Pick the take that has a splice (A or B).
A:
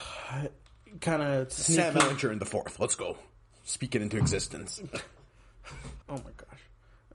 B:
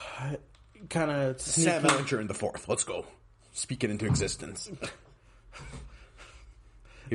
A